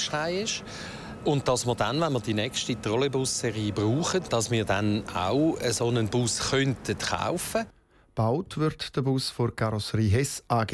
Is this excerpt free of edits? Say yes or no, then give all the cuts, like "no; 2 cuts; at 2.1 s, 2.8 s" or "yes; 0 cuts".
no; 1 cut; at 4.3 s